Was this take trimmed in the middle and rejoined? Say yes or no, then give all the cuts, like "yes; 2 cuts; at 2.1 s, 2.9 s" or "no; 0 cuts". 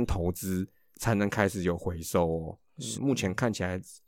yes; 1 cut; at 2.9 s